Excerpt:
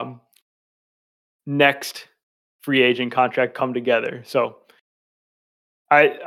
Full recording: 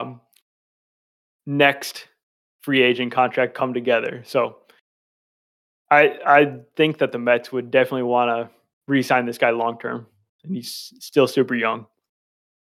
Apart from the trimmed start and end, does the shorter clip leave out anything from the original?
no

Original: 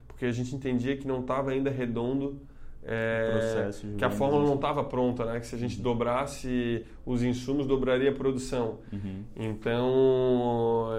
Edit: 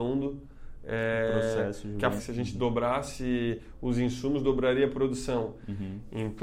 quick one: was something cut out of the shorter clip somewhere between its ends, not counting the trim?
yes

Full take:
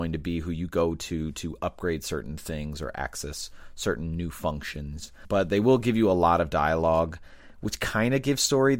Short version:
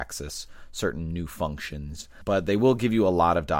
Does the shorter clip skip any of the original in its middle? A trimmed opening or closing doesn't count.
no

